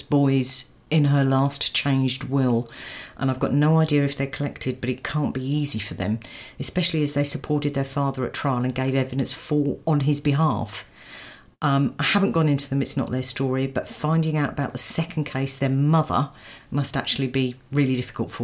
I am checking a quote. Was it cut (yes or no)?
no